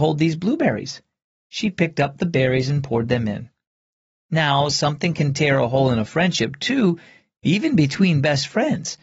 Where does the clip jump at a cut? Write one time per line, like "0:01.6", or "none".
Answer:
none